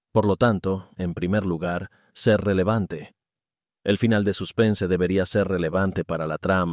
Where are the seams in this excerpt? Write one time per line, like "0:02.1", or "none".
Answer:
0:00.9